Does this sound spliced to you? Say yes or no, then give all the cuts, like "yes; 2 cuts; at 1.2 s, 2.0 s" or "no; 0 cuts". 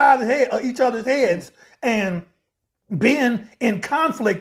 no; 0 cuts